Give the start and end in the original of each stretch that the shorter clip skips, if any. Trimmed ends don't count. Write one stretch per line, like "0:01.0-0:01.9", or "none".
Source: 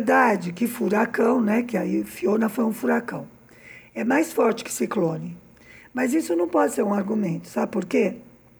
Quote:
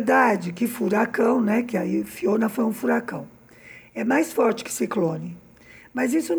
none